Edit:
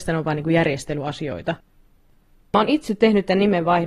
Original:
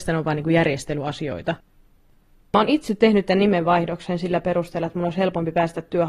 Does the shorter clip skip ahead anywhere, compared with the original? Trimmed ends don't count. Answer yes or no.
no